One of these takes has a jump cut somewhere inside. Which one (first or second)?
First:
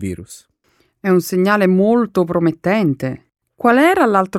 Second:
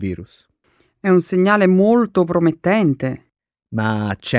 first